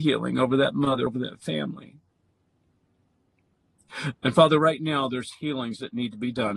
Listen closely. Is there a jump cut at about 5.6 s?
no; 2 cuts; at 1.1 s, 4.1 s

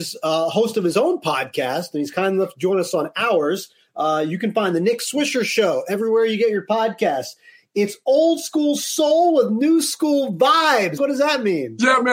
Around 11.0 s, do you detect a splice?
yes; 1 cut; at 11.0 s

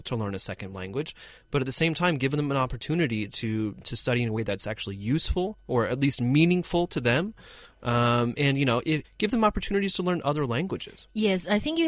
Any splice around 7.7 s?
no; 1 cut; at 9.0 s

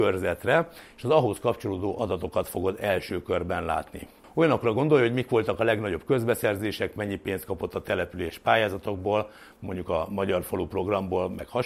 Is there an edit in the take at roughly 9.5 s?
no; 1 cut; at 4.2 s

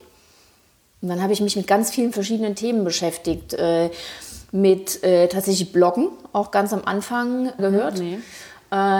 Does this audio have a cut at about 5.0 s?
no; 1 cut; at 7.6 s

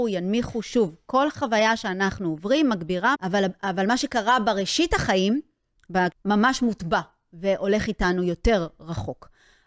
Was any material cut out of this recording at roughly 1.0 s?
no; 2 cuts; at 3.1 s, 6.1 s

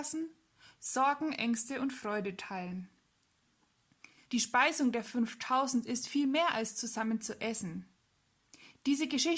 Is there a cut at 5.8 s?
no; 1 cut; at 4.3 s

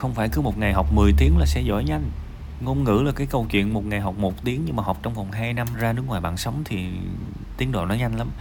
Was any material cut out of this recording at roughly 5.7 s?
yes; 1 cut; at 5.7 s

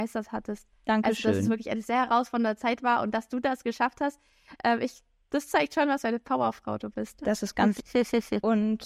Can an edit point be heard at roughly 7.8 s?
yes; 1 cut; at 7.8 s

